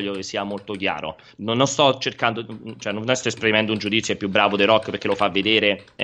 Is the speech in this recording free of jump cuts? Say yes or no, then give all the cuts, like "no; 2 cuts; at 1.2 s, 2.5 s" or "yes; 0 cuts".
no; 1 cut; at 1.4 s